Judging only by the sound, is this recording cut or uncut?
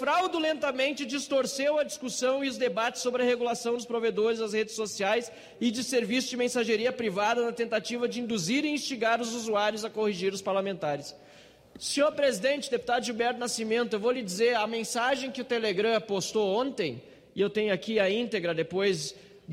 uncut